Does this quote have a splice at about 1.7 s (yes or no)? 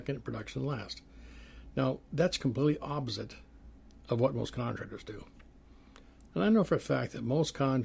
no